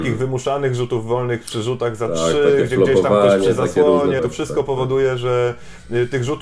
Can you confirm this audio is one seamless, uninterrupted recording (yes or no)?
no